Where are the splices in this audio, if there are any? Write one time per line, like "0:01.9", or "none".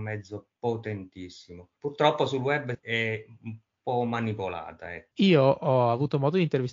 0:01.8
0:05.1